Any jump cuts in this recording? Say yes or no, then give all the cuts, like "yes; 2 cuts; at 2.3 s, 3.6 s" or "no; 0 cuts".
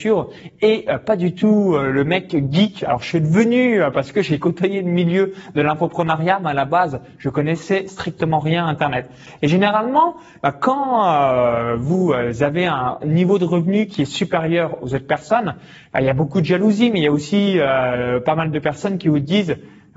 no; 0 cuts